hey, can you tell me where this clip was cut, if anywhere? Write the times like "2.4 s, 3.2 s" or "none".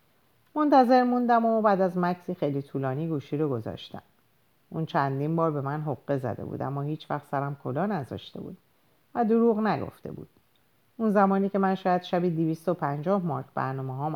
none